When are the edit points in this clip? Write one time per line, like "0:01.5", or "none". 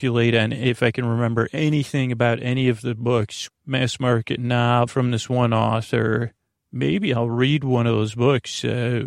0:03.5
0:04.9